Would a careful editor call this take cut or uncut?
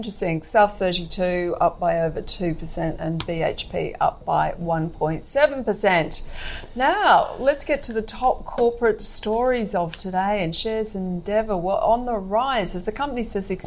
uncut